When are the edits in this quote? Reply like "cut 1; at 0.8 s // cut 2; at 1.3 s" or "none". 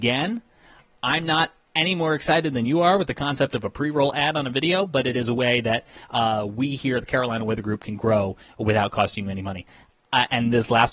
none